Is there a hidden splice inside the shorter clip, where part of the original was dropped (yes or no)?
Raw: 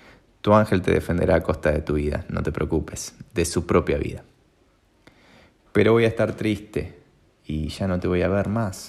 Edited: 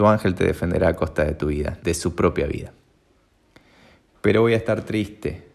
yes